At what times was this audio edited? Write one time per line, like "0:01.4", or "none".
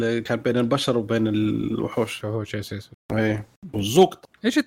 0:02.2